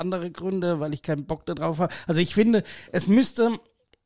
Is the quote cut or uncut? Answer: uncut